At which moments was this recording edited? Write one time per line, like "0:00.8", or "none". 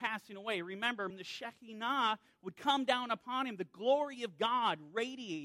0:01.1